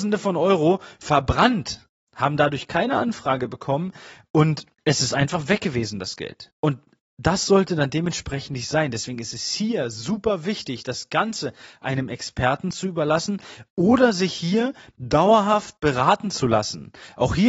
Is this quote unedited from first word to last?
yes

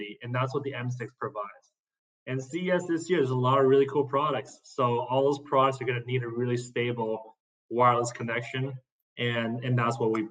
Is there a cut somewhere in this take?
no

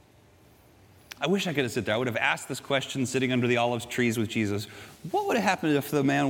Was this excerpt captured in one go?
no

